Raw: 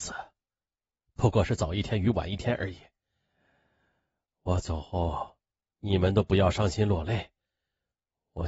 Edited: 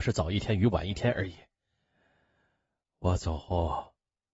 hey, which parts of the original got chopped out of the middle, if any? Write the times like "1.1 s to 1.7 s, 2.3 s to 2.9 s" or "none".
none